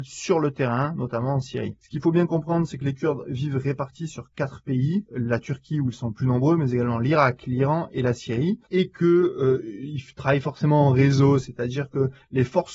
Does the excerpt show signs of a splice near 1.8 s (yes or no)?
no